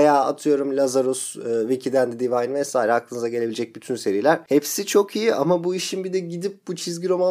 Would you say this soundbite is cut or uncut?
uncut